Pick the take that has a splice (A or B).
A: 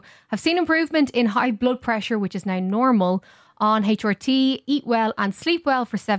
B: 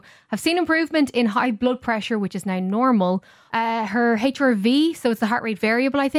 B